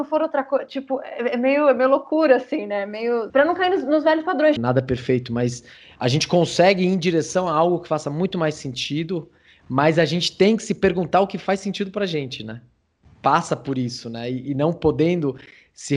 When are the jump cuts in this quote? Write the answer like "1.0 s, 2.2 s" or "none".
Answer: 3.3 s, 4.6 s